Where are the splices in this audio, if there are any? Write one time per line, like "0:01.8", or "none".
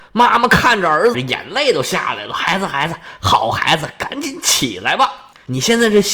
0:01.1